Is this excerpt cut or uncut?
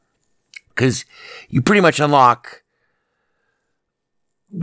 uncut